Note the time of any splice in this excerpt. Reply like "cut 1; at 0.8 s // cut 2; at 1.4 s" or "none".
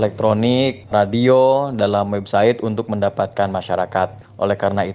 none